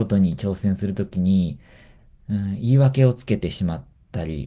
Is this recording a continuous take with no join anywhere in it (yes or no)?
yes